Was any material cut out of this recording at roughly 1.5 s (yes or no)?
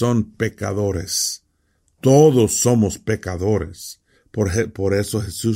no